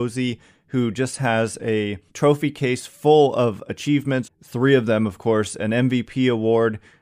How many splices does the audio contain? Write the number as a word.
two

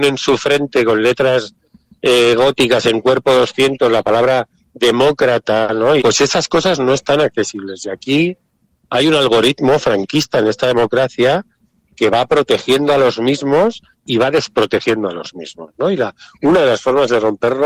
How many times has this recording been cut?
one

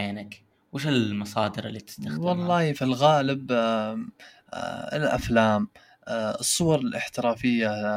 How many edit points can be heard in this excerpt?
one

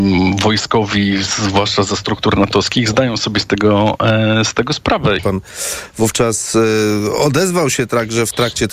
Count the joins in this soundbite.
one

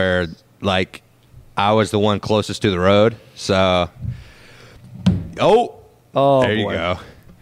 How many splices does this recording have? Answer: zero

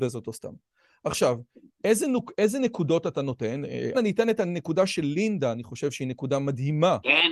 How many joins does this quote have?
one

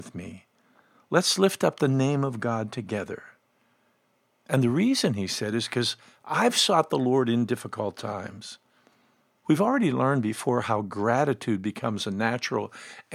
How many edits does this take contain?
one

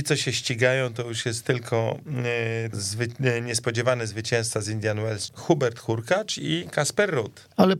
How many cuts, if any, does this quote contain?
two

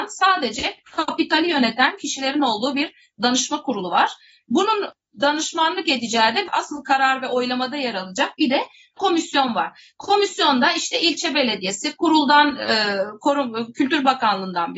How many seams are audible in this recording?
zero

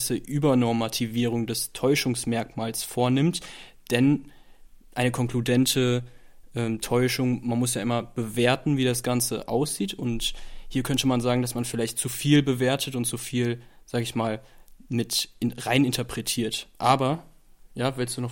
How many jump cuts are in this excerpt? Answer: zero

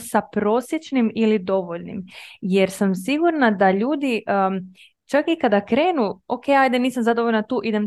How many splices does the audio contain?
zero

